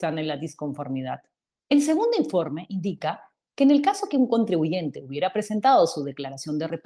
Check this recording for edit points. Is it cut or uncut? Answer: cut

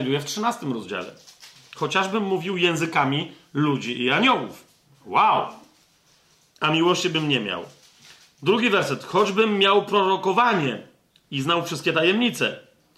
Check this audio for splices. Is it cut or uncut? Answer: uncut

